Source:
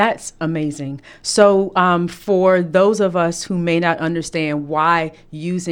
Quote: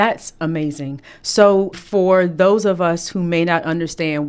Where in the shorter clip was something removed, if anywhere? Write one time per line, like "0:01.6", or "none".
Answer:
0:01.7